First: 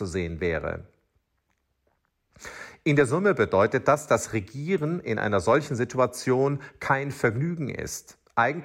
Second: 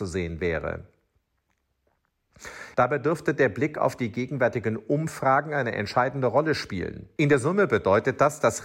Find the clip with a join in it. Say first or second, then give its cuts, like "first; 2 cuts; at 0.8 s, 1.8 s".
second; 2 cuts; at 2.7 s, 7.2 s